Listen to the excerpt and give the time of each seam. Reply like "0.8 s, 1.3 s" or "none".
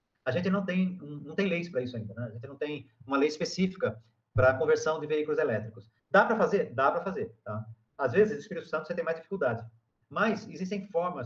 6.0 s, 10.0 s